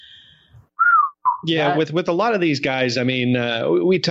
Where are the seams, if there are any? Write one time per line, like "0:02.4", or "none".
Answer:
none